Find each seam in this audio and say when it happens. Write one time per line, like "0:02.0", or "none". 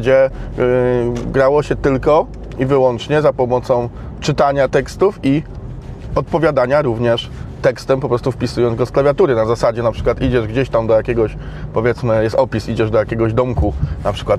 none

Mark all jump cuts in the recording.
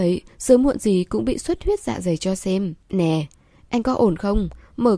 0:02.8

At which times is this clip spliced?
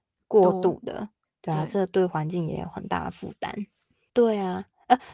0:04.1

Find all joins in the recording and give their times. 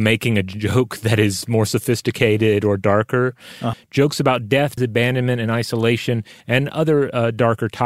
0:03.7
0:04.8

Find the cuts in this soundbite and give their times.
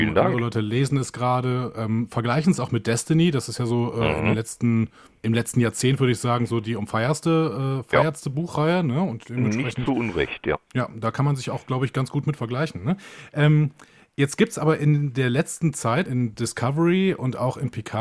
0:10.6
0:16.1

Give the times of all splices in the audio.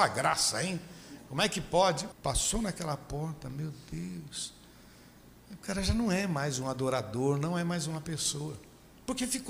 0:02.1

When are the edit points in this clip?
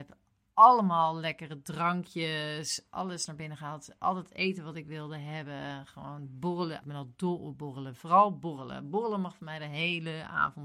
0:06.8

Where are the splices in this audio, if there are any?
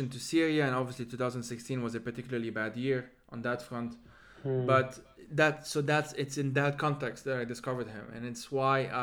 none

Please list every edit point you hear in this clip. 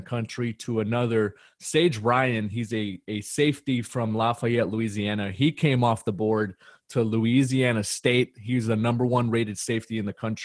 none

